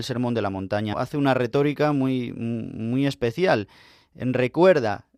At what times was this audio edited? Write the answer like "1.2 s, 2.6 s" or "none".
0.9 s